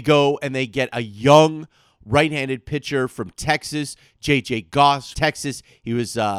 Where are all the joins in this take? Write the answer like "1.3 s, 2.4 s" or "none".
5.1 s